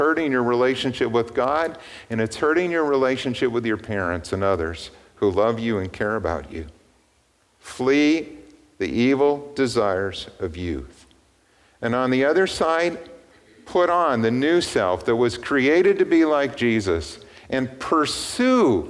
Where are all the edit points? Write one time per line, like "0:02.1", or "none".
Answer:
none